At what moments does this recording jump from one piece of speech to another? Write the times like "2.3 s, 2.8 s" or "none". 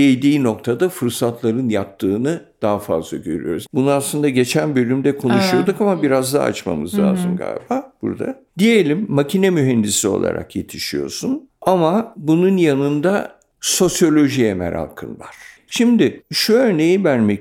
3.7 s, 15.7 s